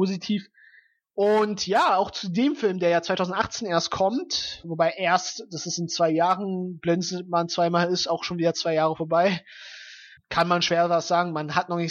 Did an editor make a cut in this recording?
yes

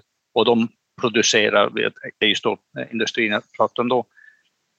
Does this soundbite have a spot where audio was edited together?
no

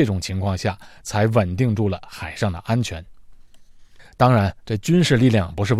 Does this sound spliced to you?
no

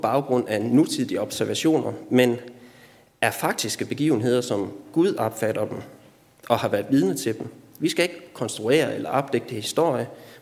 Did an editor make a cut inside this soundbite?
no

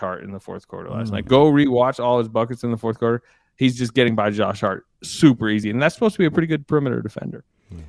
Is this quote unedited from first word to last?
yes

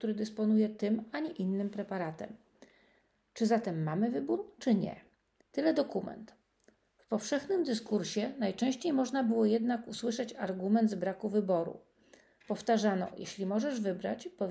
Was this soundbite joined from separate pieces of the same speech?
yes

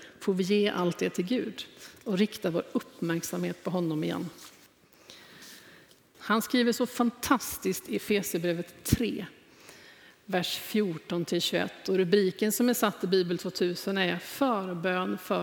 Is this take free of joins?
no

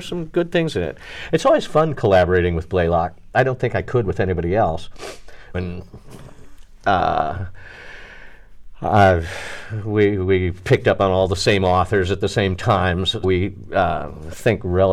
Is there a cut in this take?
yes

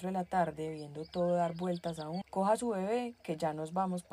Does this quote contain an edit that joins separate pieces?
yes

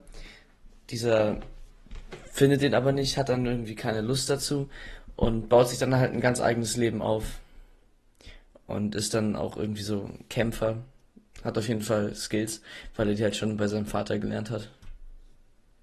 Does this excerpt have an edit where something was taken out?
no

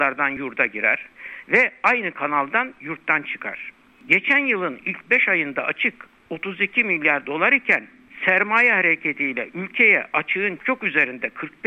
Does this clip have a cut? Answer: yes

